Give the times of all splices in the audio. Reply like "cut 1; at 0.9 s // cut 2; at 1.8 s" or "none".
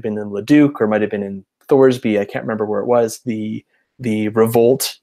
cut 1; at 3.2 s